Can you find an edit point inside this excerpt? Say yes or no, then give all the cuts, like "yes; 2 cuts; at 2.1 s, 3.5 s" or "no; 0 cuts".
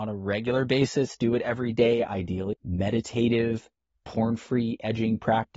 yes; 1 cut; at 2.5 s